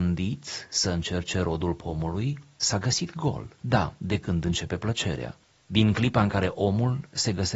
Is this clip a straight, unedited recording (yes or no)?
no